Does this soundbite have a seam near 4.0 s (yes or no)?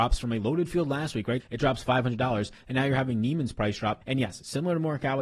yes